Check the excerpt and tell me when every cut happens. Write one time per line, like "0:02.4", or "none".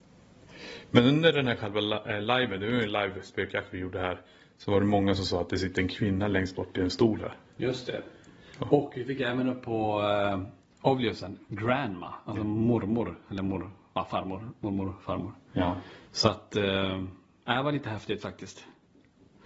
none